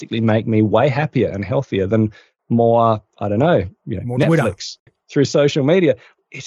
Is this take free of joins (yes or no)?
no